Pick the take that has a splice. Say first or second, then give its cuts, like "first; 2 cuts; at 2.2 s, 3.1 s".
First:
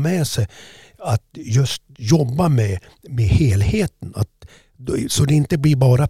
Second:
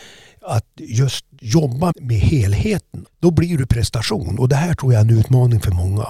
second; 2 cuts; at 1.9 s, 3.1 s